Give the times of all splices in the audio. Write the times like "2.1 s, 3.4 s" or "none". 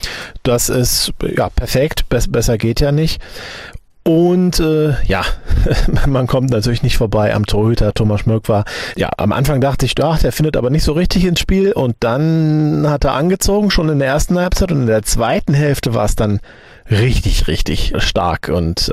8.9 s, 17.9 s

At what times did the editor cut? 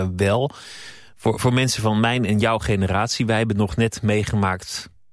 none

